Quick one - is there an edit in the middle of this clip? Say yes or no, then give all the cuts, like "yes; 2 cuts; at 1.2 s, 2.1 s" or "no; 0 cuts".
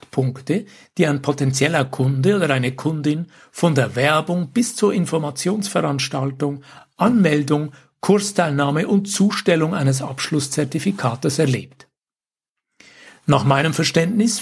no; 0 cuts